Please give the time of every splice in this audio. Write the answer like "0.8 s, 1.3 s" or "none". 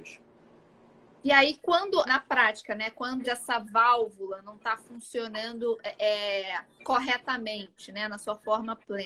2.1 s, 3.2 s